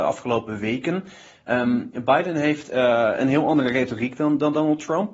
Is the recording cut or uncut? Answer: uncut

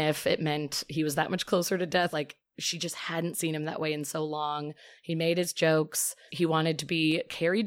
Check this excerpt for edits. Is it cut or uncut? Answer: cut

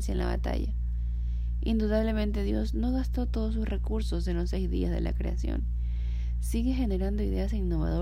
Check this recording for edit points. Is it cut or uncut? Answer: uncut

